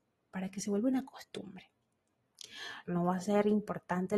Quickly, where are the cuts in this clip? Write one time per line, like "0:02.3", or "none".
0:02.8